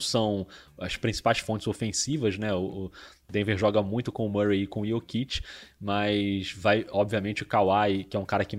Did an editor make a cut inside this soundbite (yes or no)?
no